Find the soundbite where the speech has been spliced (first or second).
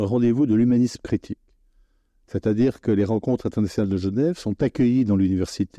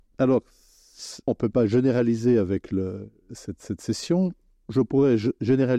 second